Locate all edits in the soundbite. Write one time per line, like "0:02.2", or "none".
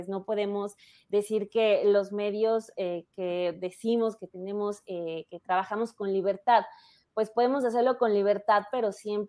none